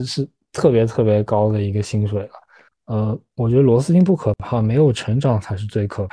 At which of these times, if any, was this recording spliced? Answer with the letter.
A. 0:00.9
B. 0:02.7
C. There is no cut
B